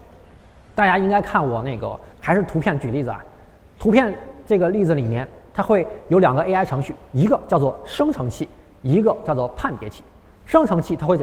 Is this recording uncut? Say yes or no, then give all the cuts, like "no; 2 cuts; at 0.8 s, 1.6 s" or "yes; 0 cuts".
no; 1 cut; at 2.1 s